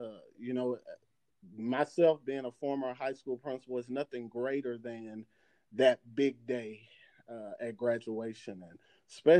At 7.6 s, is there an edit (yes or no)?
no